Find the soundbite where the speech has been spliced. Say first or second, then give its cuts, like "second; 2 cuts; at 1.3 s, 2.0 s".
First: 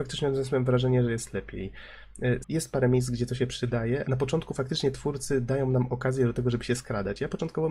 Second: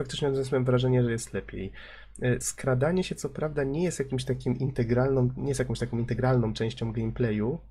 first; 2 cuts; at 2.4 s, 4.0 s